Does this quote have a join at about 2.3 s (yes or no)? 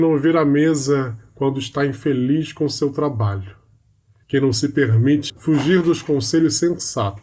no